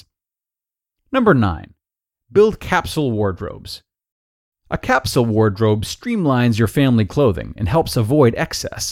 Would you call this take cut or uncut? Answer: uncut